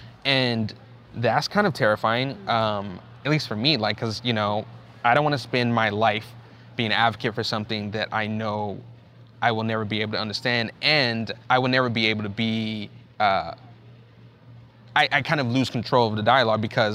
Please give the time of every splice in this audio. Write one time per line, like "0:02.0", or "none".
0:11.4